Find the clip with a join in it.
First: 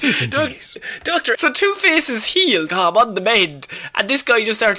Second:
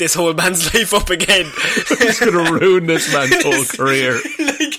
first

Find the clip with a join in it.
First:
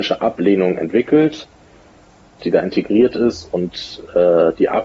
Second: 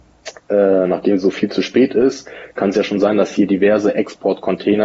first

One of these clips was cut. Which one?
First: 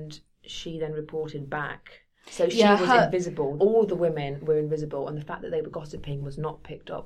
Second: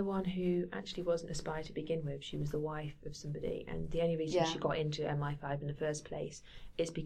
first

